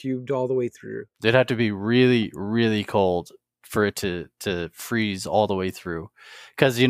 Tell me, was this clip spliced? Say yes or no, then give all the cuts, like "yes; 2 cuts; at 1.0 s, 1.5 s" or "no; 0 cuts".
yes; 1 cut; at 1.1 s